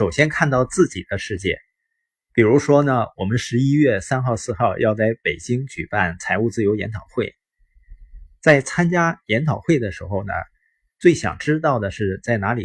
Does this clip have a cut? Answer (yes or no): yes